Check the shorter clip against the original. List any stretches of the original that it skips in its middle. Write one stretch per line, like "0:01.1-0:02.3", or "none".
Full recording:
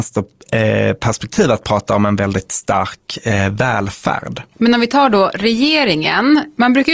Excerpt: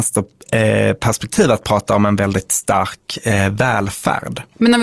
none

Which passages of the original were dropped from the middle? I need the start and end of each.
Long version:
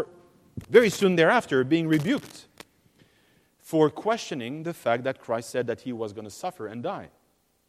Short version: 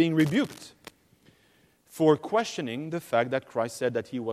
none

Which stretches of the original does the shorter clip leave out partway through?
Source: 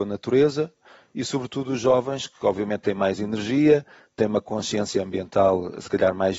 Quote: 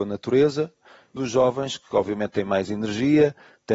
0:01.2-0:01.7

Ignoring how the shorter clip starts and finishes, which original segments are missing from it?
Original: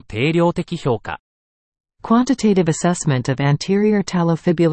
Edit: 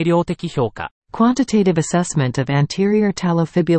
0:01.3-0:01.9

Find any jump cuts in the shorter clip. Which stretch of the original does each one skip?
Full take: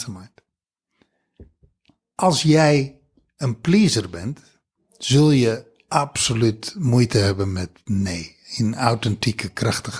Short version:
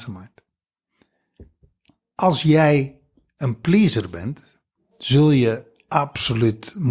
none

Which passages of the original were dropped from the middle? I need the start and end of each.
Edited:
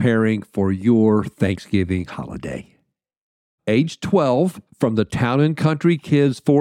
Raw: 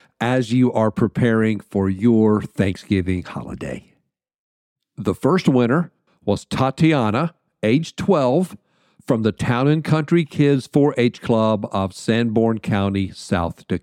0:04.8-0:07.5
0:08.6-0:08.9

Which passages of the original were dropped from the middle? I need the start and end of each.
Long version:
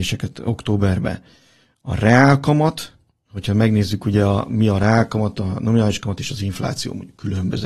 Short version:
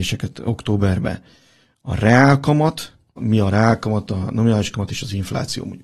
0:03.2-0:04.5

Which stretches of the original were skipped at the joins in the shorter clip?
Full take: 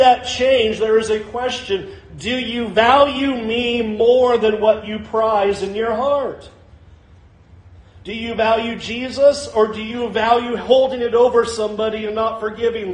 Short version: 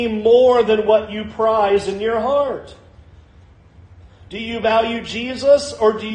none

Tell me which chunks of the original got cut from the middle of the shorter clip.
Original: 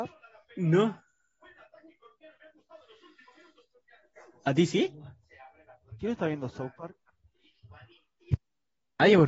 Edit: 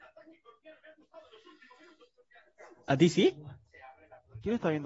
none

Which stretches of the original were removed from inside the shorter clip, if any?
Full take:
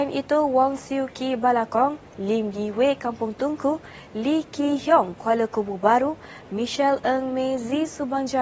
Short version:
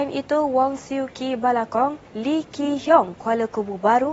0:02.0-0:04.0

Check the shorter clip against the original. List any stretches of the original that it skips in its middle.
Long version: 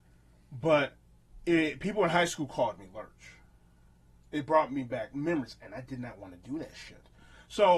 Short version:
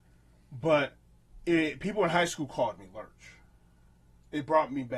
none

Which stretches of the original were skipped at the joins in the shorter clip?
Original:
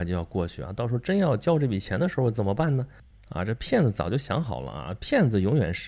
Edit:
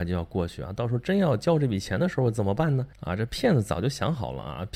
0:02.9-0:03.2

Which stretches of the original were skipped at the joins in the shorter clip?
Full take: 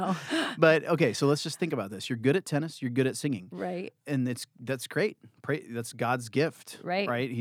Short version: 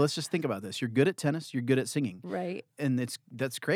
none

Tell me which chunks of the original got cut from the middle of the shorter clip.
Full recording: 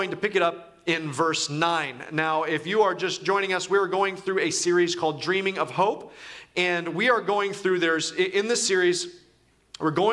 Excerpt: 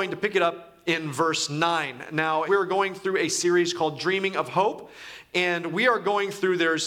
0:02.5-0:03.7

